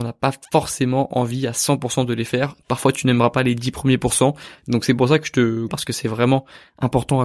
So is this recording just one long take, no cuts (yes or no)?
no